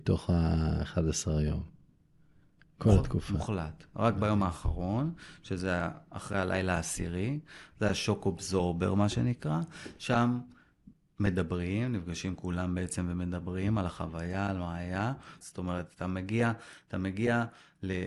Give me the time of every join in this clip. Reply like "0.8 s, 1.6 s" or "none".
15.4 s